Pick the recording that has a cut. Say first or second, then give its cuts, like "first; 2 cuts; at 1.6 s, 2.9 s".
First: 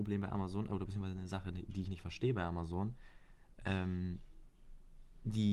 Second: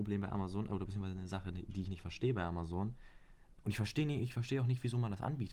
second; 1 cut; at 3.6 s